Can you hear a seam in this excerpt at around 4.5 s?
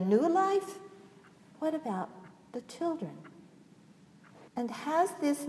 yes; 2 cuts; at 1.5 s, 4.5 s

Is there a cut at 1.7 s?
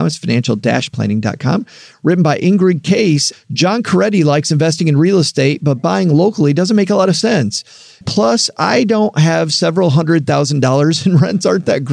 no; 2 cuts; at 3.3 s, 8.0 s

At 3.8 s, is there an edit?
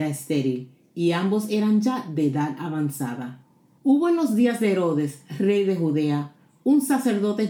yes; 1 cut; at 3.8 s

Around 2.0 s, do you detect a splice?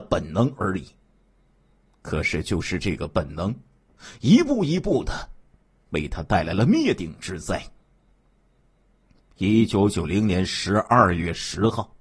no; 0 cuts

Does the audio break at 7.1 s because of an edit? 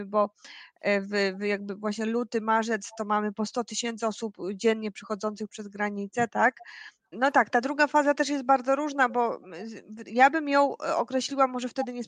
yes; 1 cut; at 7.1 s

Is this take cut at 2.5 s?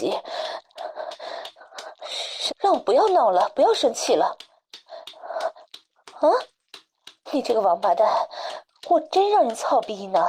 yes; 2 cuts; at 2.5 s, 7.3 s

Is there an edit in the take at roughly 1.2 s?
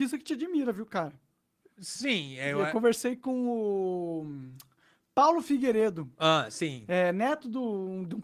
no; 0 cuts

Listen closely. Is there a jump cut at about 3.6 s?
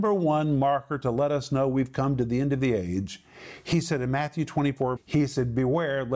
no; 1 cut; at 5.0 s

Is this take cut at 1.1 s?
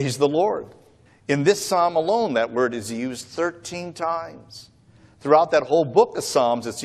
yes; 1 cut; at 1.1 s

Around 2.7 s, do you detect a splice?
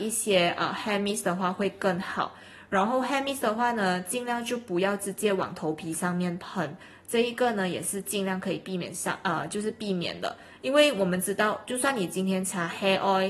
no; 0 cuts

